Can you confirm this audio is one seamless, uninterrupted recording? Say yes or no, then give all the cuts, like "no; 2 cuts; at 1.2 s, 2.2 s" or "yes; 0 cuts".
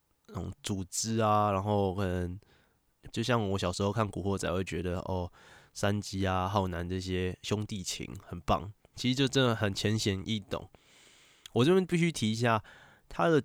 no; 2 cuts; at 3.1 s, 8.9 s